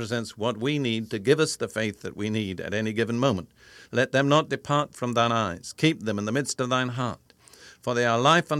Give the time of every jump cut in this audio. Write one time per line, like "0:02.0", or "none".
0:03.9